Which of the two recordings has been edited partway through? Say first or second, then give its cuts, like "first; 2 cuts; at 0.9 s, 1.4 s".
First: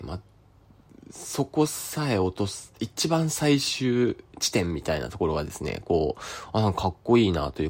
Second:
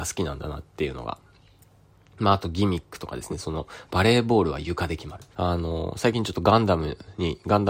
second; 2 cuts; at 3.3 s, 5.3 s